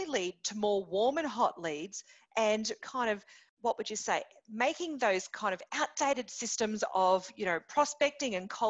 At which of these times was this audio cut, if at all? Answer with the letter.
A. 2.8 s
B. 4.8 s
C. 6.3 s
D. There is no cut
A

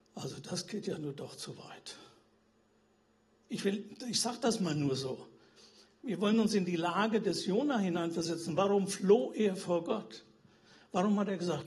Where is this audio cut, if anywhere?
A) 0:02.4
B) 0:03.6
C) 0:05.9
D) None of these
D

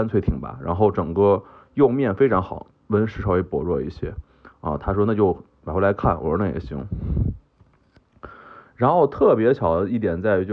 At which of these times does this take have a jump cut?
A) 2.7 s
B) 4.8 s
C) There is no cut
A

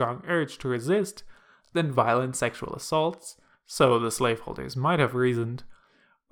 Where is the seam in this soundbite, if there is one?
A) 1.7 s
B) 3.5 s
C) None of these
C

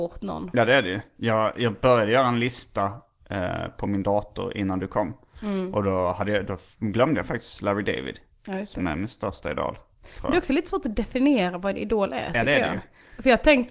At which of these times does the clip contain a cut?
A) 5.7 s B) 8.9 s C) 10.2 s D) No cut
D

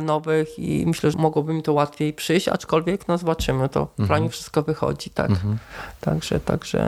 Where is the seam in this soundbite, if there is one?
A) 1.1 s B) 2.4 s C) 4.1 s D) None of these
A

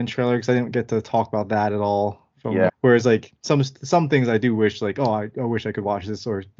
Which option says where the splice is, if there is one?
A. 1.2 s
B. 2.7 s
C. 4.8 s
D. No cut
B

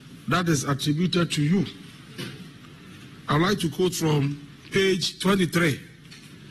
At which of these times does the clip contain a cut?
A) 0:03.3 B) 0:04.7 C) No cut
A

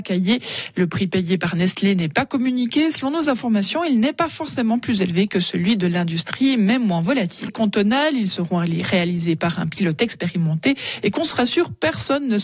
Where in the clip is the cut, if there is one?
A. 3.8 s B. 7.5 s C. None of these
B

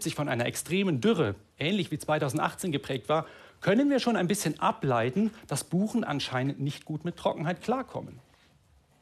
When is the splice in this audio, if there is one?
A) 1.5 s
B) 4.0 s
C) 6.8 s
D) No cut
D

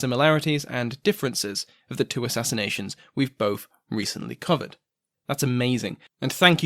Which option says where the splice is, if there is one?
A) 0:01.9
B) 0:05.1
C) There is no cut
B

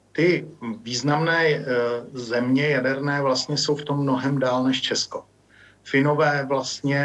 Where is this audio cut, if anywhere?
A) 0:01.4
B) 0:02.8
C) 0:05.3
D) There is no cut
D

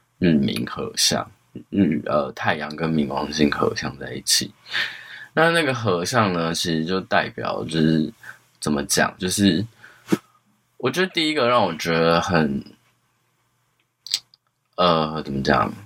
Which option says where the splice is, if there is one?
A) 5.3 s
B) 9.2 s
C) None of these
B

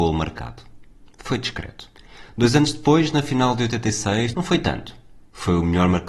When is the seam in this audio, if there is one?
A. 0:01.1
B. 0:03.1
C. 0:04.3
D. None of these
C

